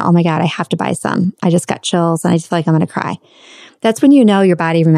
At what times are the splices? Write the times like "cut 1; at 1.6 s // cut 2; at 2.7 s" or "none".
none